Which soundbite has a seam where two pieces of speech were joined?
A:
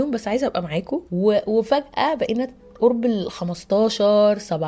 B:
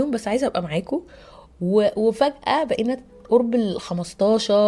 A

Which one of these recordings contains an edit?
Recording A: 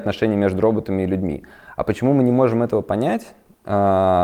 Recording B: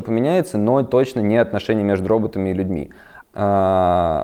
B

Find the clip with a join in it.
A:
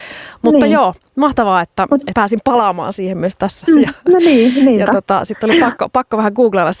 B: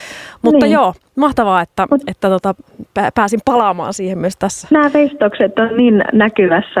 A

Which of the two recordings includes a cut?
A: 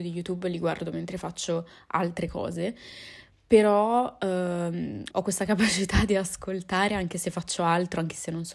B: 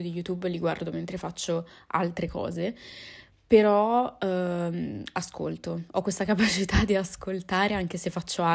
A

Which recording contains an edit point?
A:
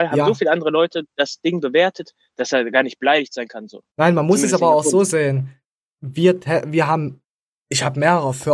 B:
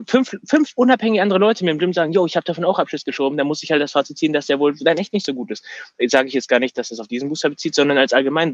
A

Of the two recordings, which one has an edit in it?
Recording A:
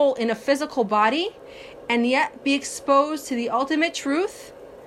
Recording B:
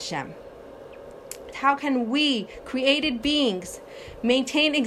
B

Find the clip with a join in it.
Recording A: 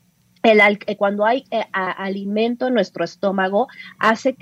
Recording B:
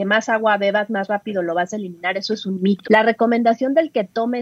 B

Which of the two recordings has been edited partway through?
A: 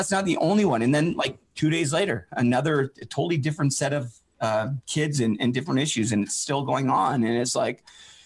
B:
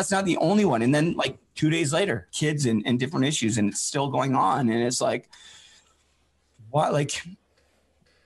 B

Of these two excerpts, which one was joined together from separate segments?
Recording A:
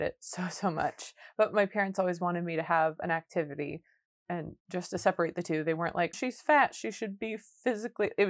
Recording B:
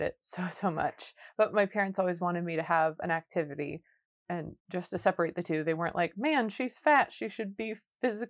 A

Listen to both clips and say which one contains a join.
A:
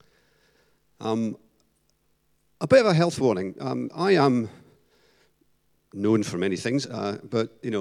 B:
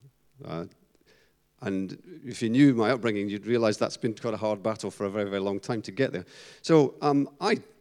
A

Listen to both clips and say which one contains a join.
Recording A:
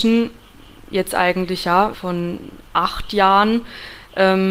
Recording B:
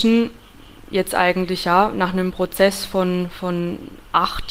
A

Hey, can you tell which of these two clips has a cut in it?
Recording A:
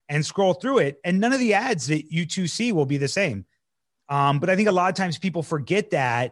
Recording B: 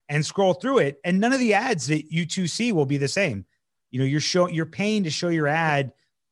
B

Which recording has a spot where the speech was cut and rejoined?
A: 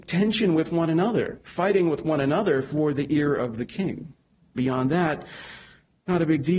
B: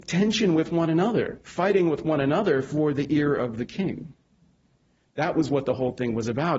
A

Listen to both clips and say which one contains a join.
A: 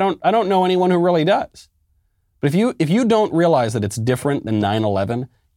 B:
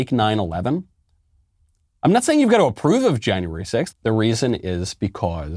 B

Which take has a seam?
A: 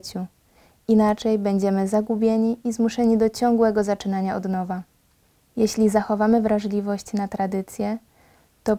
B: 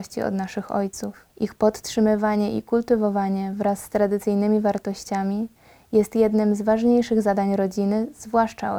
B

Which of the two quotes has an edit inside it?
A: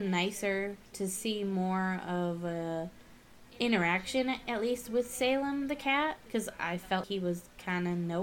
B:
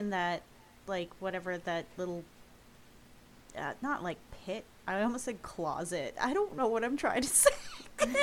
A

